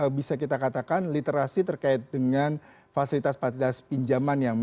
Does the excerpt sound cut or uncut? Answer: uncut